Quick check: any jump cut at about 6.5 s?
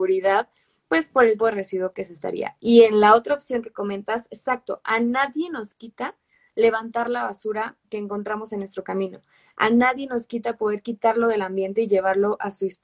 no; 1 cut; at 1.4 s

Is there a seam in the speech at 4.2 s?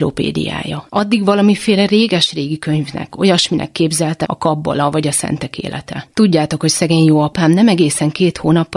yes; 3 cuts; at 3.1 s, 4.2 s, 6.1 s

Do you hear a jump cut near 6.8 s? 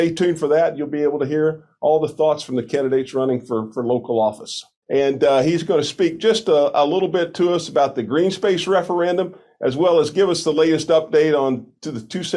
no; 1 cut; at 4.8 s

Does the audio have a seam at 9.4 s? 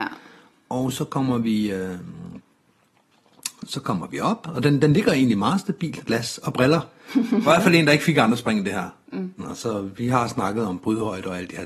yes; 3 cuts; at 6.0 s, 7.5 s, 9.4 s

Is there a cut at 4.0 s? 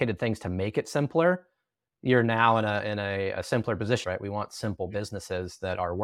yes; 1 cut; at 4.0 s

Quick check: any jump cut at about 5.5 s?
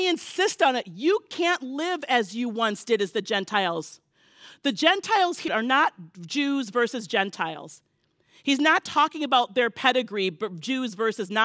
yes; 1 cut; at 5.5 s

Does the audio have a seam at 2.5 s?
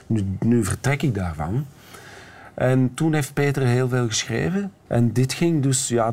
no; 1 cut; at 4.9 s

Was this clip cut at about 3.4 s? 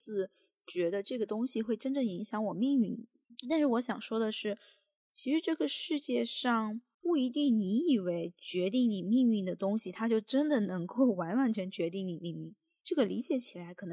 no; 1 cut; at 11.5 s

